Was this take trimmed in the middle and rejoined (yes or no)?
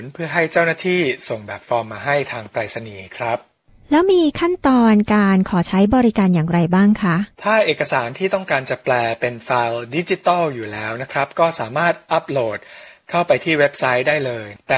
yes